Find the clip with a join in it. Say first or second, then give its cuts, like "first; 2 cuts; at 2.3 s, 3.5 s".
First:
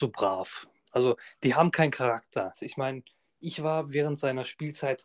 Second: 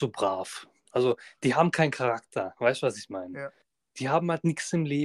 first; 1 cut; at 2.5 s